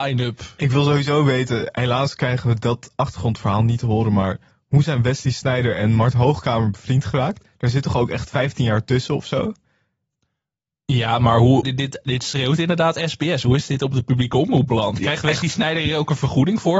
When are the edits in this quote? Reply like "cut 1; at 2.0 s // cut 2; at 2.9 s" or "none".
cut 1; at 11.6 s

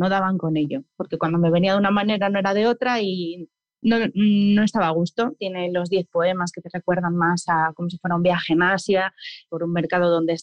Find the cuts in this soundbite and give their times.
cut 1; at 5.4 s // cut 2; at 9.5 s

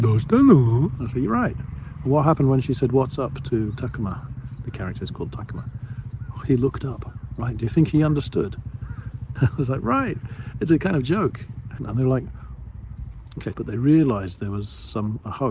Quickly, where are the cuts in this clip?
cut 1; at 9.4 s // cut 2; at 11.8 s // cut 3; at 13.5 s

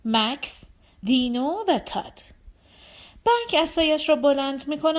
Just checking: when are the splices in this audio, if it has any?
cut 1; at 1.0 s

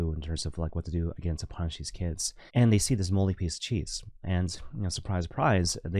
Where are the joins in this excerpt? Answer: cut 1; at 2.5 s // cut 2; at 4.2 s

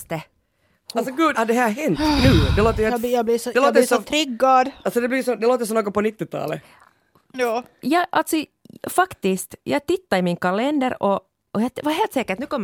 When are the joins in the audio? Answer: cut 1; at 1.3 s

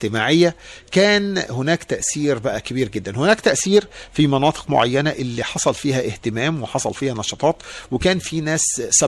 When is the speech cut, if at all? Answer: none

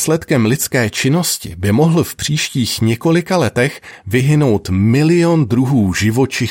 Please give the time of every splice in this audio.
none

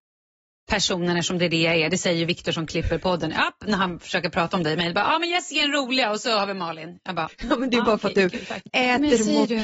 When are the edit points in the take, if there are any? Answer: cut 1; at 8.7 s

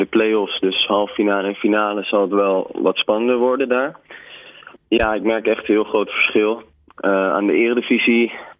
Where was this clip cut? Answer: cut 1; at 4.8 s

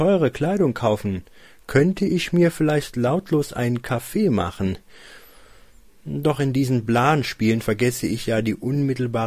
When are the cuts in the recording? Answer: none

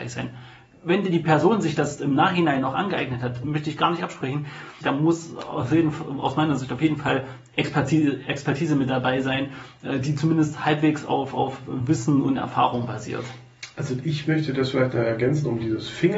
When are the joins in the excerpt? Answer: cut 1; at 3.4 s // cut 2; at 4.8 s

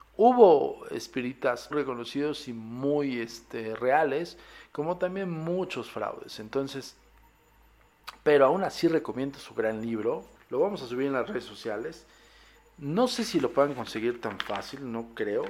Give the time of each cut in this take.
cut 1; at 1.7 s // cut 2; at 10.3 s

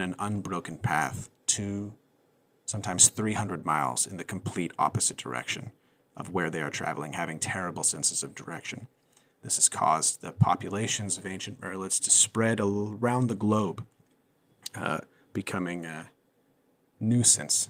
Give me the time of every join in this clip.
none

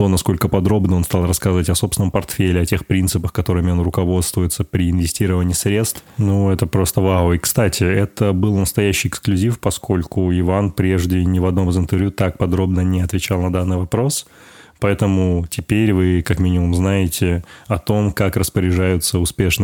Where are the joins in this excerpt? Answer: none

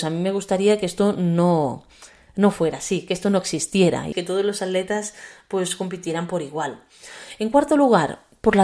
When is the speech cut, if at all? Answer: cut 1; at 4.1 s

